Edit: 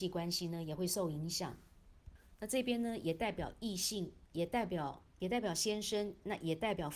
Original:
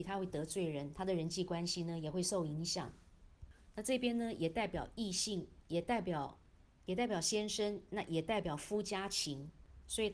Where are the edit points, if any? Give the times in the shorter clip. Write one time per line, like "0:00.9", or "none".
0:05.1